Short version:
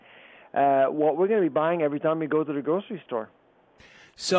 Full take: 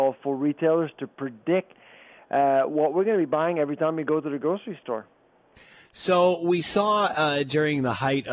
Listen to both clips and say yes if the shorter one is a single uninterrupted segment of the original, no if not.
yes